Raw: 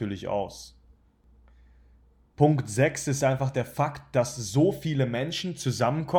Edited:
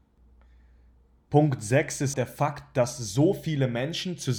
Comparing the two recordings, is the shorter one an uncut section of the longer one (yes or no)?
no